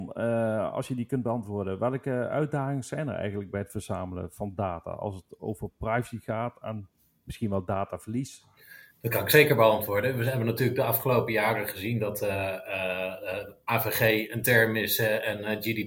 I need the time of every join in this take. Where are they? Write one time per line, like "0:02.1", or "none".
0:08.9